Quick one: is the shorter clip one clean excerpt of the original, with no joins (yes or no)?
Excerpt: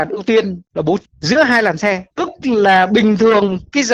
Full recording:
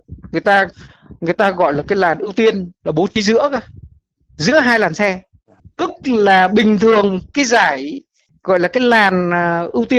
no